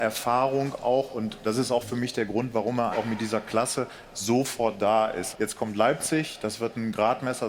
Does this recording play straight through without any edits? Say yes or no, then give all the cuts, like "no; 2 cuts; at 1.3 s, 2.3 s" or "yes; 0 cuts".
no; 2 cuts; at 2.9 s, 5.3 s